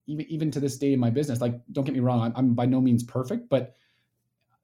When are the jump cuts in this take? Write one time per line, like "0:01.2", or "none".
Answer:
none